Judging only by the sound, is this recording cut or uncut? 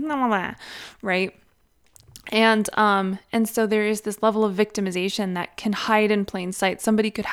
uncut